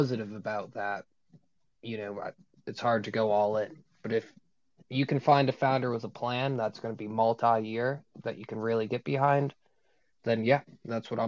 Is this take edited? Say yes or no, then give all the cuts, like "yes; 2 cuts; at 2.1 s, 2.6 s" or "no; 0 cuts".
no; 0 cuts